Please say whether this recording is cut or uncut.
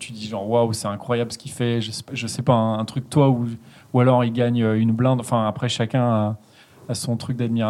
cut